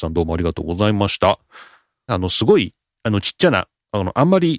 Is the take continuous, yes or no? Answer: no